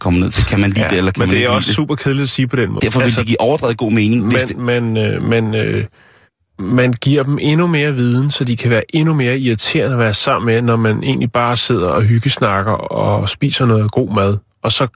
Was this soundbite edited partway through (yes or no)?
yes